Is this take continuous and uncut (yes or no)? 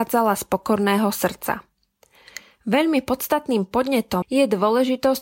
no